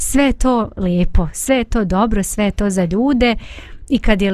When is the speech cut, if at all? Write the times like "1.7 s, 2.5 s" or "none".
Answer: none